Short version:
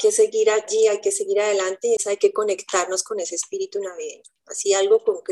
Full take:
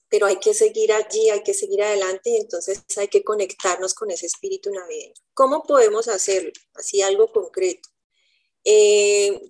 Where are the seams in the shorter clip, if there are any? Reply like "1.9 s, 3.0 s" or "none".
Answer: 2.0 s, 4.4 s